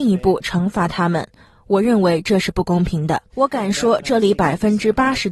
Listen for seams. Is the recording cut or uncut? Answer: cut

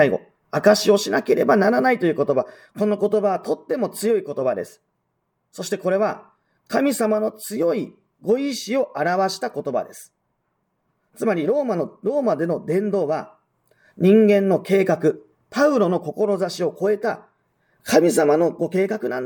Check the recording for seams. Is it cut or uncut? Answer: uncut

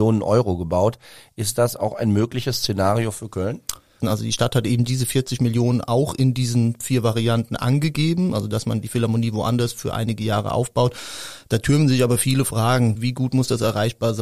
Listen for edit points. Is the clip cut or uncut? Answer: cut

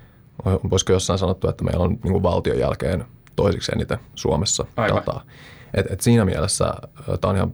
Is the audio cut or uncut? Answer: uncut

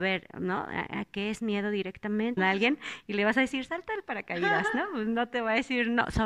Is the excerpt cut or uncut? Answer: cut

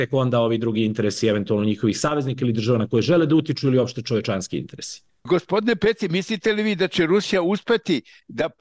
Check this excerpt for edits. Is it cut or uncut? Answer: uncut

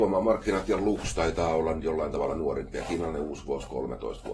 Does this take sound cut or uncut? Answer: uncut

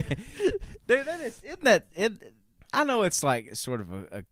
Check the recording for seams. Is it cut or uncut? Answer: uncut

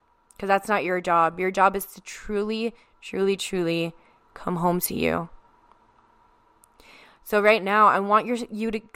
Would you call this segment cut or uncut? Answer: uncut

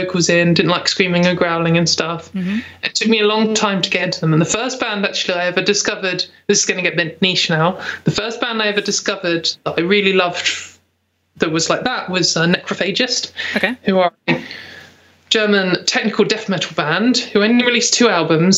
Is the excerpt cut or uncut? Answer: uncut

